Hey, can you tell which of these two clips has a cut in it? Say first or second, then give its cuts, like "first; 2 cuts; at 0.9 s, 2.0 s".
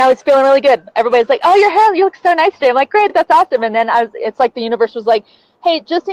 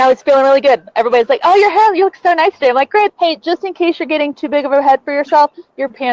second; 2 cuts; at 3.1 s, 4.3 s